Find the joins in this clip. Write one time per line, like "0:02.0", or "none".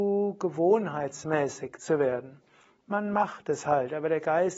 none